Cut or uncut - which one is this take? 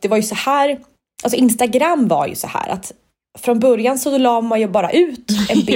uncut